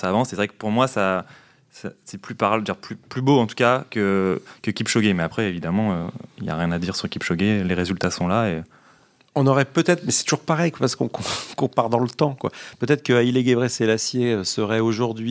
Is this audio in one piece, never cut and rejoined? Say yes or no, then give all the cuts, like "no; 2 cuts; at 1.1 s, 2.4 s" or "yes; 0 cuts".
yes; 0 cuts